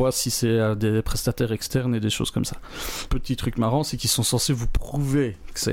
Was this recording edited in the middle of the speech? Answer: yes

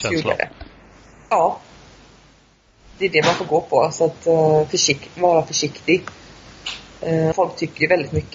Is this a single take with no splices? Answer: no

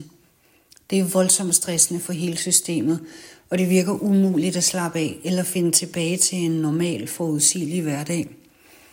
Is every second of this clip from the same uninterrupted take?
yes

